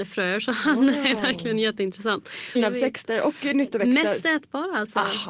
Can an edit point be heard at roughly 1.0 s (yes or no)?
no